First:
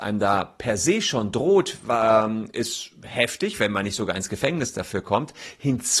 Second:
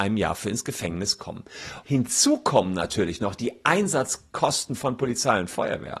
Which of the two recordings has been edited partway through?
second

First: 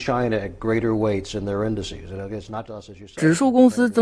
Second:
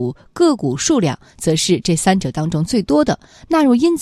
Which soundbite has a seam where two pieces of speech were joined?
first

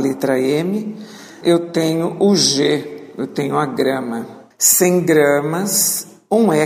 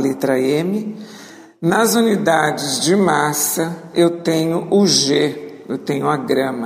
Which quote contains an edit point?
first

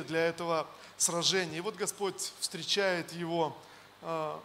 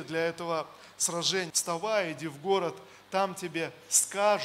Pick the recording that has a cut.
second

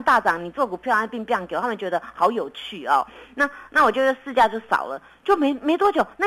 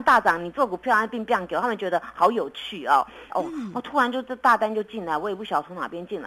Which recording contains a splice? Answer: second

